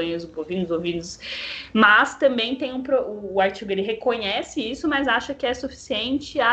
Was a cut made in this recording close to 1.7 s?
no; 0 cuts

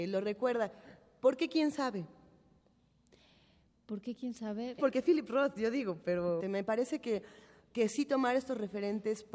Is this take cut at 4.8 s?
yes; 2 cuts; at 4.8 s, 6.4 s

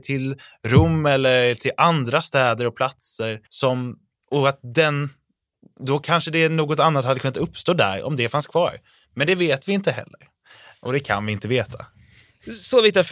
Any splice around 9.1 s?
no; 1 cut; at 3.5 s

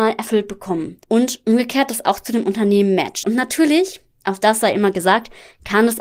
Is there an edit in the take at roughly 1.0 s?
yes; 2 cuts; at 1.0 s, 3.2 s

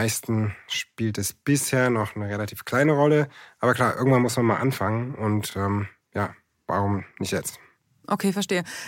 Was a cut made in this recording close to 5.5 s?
no; 0 cuts

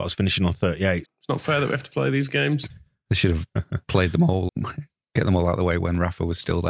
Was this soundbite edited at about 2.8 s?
no; 2 cuts; at 1.0 s, 4.5 s

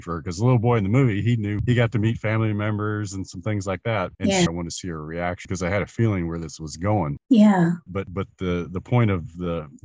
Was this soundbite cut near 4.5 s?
yes; 2 cuts; at 4.5 s, 7.9 s

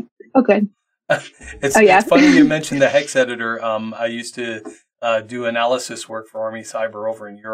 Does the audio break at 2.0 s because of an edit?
no; 0 cuts

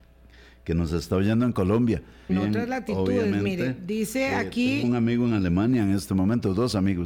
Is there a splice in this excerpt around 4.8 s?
no; 1 cut; at 2.3 s

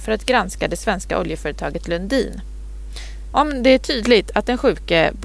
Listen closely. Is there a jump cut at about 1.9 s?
no; 1 cut; at 3.3 s

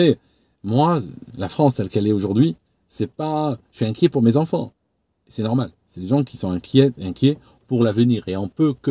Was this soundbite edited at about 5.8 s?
no; 1 cut; at 1.3 s

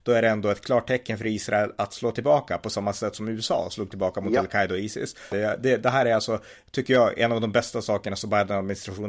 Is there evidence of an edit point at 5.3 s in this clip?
yes; 1 cut; at 5.3 s

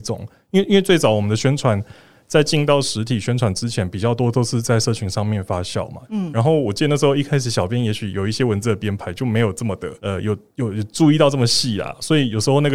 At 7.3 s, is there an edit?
no; 2 cuts; at 6.1 s, 10.0 s

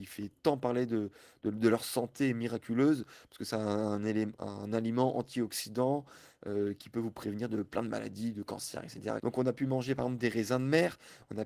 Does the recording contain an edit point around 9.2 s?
yes; 1 cut; at 9.2 s

